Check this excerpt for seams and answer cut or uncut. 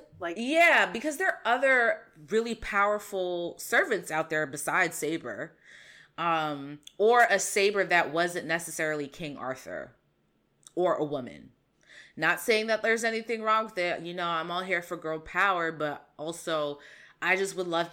uncut